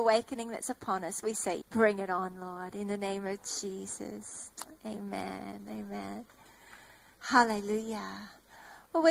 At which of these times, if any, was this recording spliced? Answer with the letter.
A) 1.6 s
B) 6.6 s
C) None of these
A